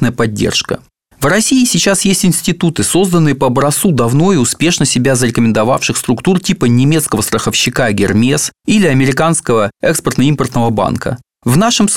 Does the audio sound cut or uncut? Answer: uncut